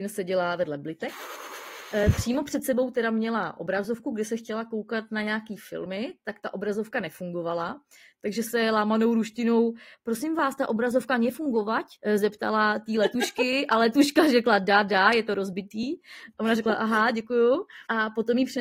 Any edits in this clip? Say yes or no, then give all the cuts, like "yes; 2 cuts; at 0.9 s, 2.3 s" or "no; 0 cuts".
no; 0 cuts